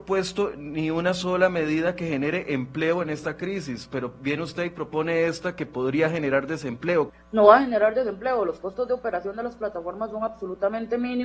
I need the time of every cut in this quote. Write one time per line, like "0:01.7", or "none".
0:07.1